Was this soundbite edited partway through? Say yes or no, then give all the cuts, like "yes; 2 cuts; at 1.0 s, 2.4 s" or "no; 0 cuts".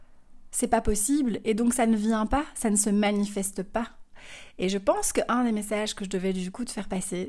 no; 0 cuts